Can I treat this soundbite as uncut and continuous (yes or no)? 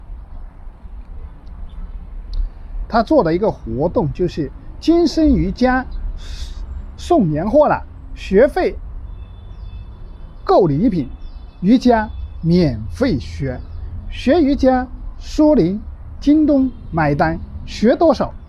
no